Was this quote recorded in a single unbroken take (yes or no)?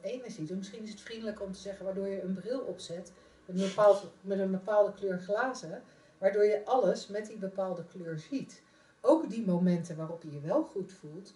no